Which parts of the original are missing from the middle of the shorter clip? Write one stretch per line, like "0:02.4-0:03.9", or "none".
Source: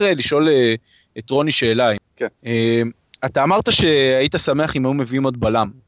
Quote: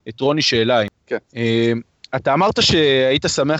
none